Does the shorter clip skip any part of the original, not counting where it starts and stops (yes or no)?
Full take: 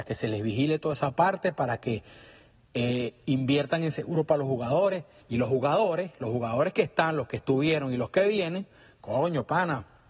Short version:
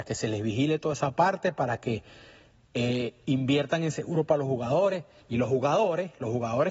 no